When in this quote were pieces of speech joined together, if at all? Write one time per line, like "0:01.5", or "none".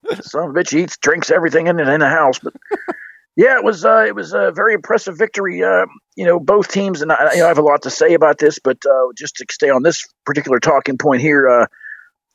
none